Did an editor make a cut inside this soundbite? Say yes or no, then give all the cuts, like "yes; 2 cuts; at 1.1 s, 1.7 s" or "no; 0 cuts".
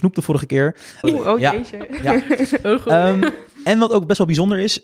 yes; 1 cut; at 1.0 s